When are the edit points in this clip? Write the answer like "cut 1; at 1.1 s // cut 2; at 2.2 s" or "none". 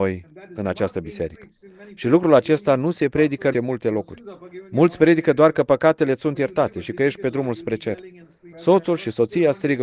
cut 1; at 3.5 s // cut 2; at 8.5 s